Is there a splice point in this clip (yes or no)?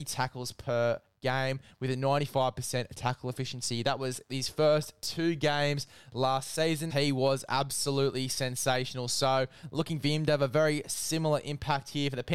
yes